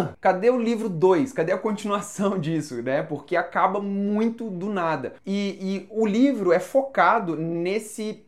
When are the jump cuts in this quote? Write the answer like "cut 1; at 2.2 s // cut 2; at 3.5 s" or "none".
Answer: none